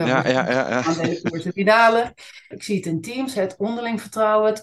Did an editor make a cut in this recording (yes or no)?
yes